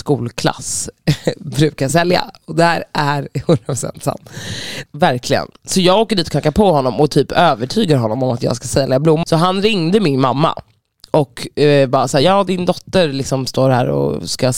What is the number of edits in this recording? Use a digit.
2